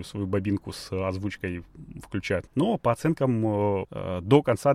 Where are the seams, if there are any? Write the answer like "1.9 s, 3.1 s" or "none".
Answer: 2.5 s, 3.8 s